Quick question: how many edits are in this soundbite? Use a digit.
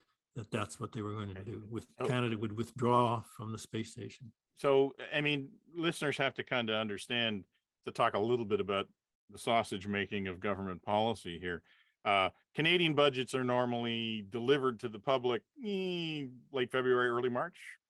1